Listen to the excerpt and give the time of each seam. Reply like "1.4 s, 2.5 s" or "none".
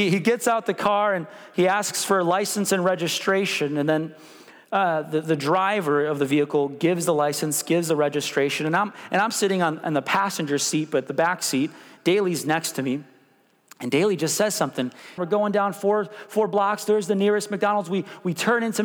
15.2 s